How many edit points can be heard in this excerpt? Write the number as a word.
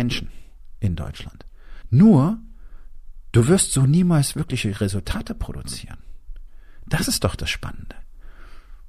one